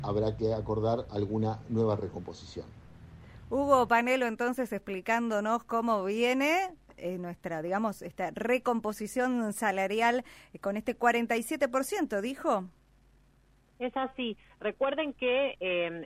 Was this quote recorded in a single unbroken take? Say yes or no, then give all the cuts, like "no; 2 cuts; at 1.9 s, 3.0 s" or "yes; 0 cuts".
yes; 0 cuts